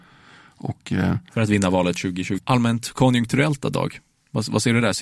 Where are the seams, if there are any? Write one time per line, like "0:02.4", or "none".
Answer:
0:02.4